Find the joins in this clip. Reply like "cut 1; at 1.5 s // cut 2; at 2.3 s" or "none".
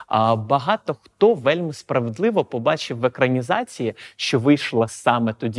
none